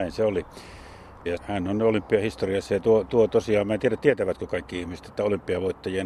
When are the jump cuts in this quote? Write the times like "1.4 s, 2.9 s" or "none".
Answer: 1.3 s